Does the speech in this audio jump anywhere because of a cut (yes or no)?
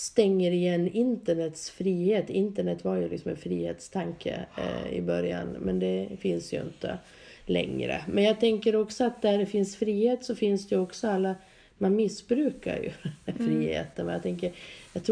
no